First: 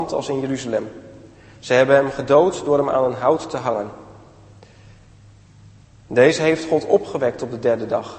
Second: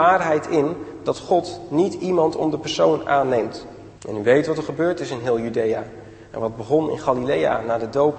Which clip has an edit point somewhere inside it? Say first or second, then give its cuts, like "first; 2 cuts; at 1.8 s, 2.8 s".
second; 1 cut; at 3.9 s